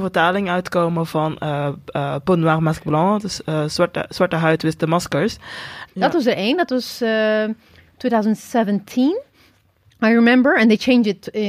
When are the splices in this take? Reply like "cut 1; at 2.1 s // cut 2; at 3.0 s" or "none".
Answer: cut 1; at 5.9 s

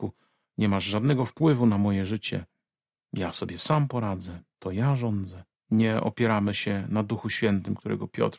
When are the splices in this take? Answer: cut 1; at 5.6 s

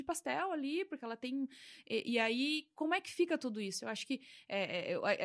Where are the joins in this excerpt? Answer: none

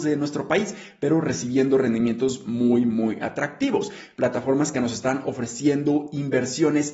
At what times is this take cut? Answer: cut 1; at 4.1 s

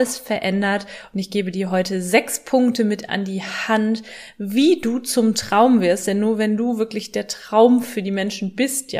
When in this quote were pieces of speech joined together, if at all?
none

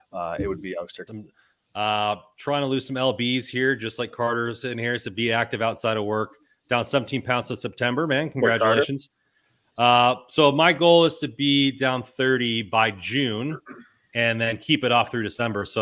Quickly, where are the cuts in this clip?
cut 1; at 1.1 s

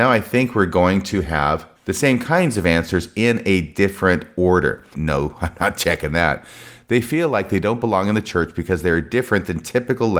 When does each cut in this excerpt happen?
cut 1; at 4.9 s

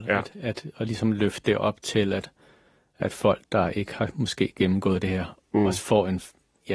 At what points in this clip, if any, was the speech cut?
none

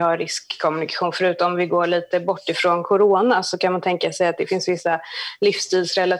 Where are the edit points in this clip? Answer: none

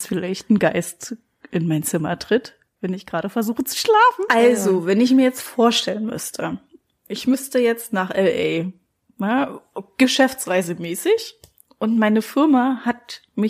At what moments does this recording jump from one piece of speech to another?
cut 1; at 4.3 s

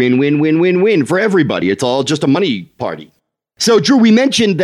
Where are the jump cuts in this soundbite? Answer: none

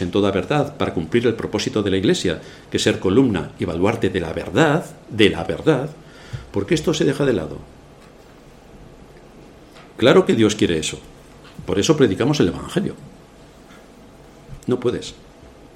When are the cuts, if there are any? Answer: cut 1; at 14.6 s

